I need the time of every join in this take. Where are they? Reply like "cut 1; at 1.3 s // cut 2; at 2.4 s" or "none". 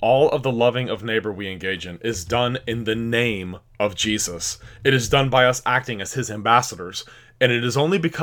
none